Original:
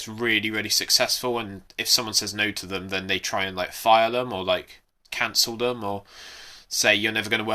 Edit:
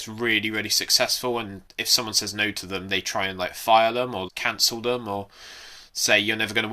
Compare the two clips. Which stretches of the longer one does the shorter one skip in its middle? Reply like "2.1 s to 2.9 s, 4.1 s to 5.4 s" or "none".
2.9 s to 3.1 s, 4.4 s to 5.0 s